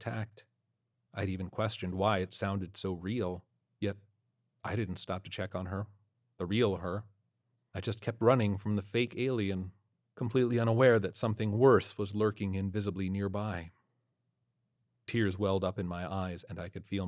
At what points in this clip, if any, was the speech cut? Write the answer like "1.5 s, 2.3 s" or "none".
3.8 s